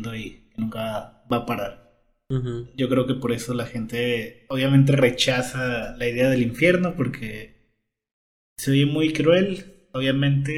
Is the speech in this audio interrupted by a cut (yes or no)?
no